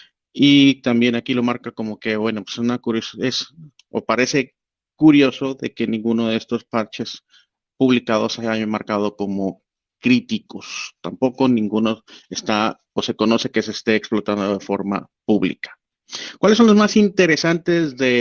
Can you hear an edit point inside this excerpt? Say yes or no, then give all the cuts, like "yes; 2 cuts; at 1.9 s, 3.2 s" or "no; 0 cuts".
no; 0 cuts